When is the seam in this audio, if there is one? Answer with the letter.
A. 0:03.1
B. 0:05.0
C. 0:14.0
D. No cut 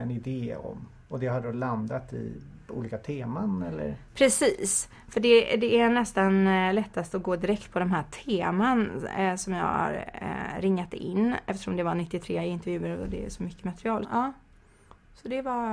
C